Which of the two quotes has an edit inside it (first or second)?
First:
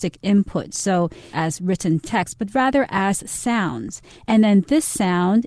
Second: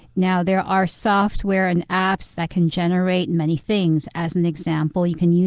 first